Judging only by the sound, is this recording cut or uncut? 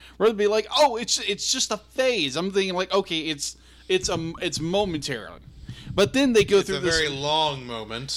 uncut